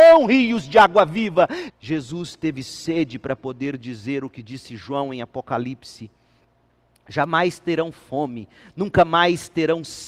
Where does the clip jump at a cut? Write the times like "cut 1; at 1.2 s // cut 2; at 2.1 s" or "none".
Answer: cut 1; at 1.7 s